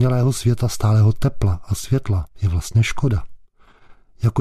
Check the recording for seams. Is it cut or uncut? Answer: cut